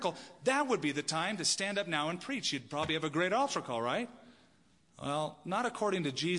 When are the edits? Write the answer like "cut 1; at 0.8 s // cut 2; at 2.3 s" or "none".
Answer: none